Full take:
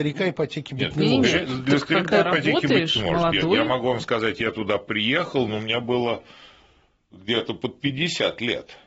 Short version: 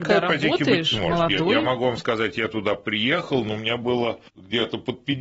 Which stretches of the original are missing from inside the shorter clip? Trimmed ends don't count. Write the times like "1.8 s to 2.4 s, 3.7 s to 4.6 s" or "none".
6.3 s to 7.0 s